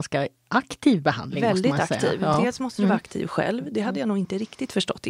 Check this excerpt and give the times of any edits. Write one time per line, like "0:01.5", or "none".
none